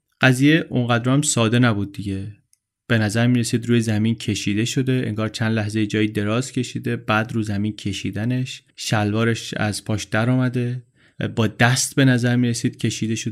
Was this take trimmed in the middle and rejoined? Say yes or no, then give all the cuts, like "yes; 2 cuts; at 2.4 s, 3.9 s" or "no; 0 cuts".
yes; 1 cut; at 8.7 s